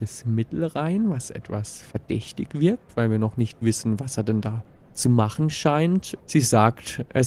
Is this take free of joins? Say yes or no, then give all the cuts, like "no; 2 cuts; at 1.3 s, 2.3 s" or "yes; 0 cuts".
no; 1 cut; at 6.2 s